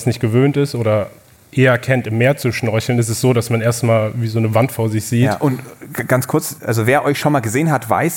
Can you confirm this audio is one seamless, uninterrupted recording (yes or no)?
yes